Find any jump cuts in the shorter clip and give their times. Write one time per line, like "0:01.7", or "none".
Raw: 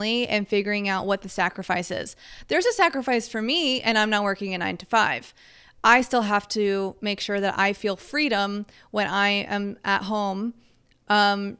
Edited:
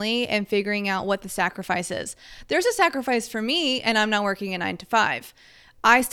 none

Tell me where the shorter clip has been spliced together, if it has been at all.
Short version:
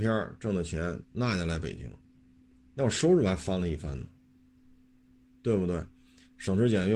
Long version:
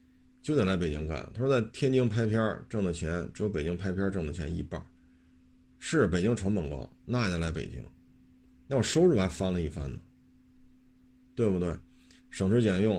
0:01.0

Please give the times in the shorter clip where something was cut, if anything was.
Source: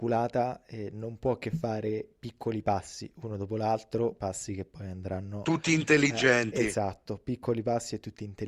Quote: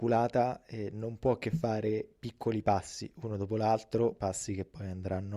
none

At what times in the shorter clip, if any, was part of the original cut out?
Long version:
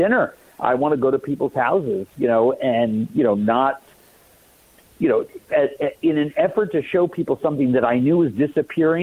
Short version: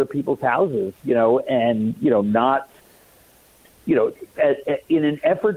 none

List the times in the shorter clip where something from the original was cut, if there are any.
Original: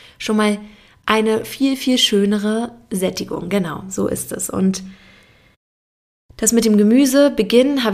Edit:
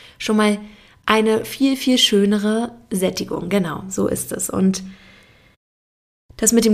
none

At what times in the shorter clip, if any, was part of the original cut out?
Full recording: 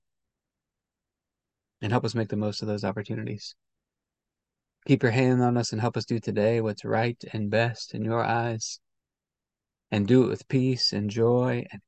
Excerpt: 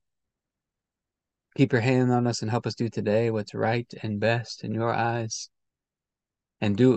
0:01.5

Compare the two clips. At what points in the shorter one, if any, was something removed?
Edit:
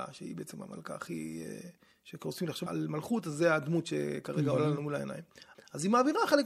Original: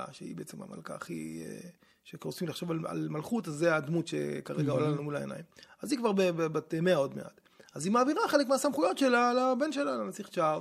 0:02.7
0:05.5

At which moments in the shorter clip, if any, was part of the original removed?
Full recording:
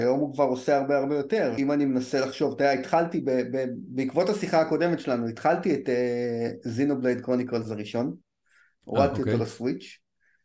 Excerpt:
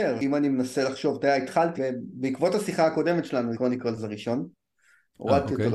0:01.8
0:03.5

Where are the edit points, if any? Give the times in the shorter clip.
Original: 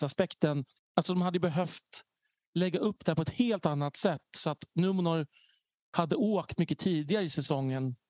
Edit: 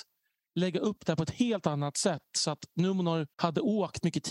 0:03.3

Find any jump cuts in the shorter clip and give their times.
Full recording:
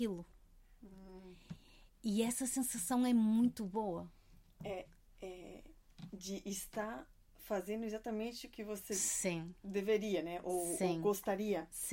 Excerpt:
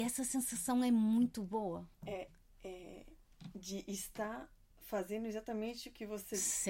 0:01.9

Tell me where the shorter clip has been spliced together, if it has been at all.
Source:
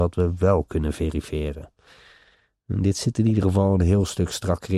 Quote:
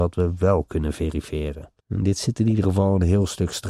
0:01.8

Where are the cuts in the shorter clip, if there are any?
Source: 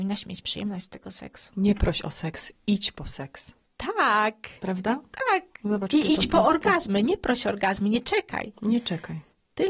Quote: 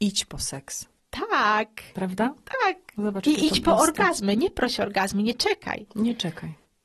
none

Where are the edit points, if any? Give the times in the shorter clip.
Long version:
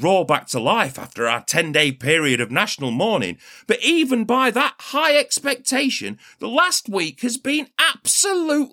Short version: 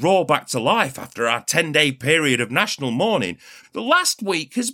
0:03.6

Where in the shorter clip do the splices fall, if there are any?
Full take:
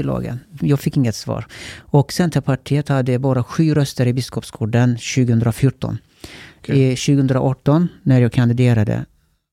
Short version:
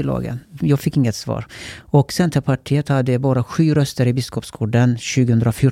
none

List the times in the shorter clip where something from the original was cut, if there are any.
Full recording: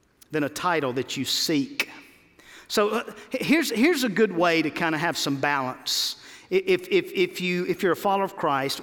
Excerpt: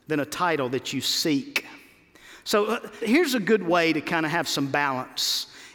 0:03.0

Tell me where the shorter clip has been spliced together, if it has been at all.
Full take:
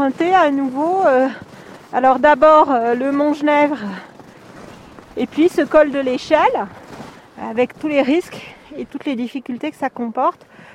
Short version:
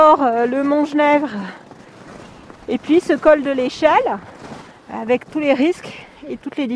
none

